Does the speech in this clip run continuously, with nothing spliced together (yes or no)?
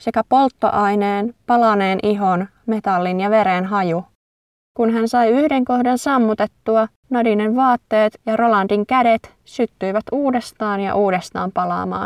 no